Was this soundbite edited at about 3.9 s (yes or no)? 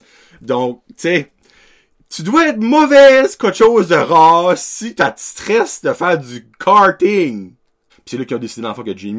no